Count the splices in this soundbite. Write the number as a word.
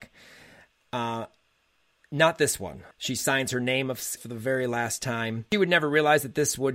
two